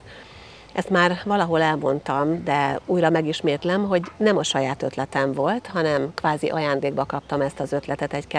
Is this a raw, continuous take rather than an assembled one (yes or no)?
yes